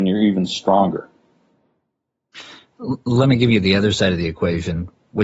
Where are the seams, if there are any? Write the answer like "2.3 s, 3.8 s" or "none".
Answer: none